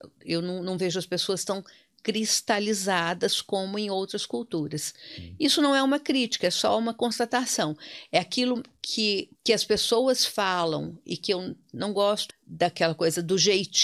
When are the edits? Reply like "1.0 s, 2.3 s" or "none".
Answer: 9.3 s, 12.3 s